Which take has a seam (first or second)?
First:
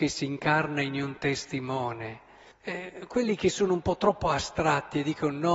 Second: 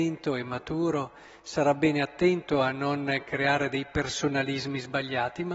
first